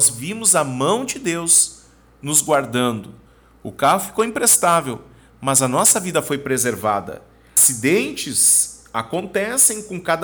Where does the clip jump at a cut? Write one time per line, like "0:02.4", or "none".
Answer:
none

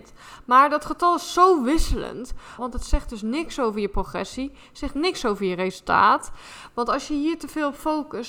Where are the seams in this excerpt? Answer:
0:02.6

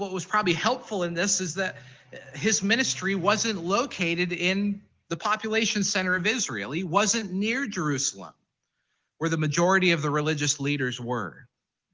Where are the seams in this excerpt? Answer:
none

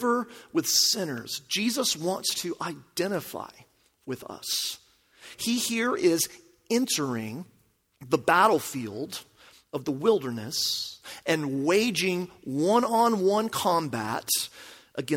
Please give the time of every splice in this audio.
0:05.3

